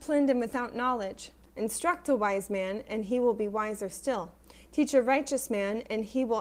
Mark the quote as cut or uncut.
cut